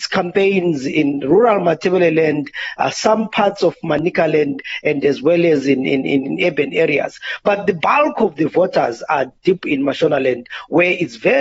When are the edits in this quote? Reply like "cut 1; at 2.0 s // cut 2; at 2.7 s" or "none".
none